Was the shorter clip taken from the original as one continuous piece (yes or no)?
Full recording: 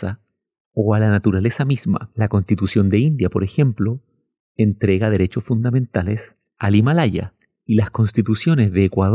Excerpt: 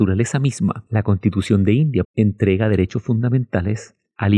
no